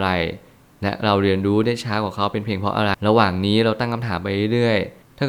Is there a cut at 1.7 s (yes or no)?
no